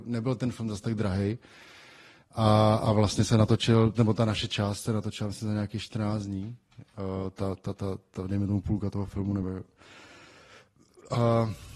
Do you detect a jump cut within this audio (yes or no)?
no